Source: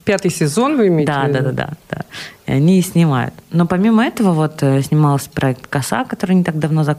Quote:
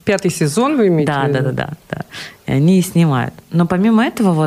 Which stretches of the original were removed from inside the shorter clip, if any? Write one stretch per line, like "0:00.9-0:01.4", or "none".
none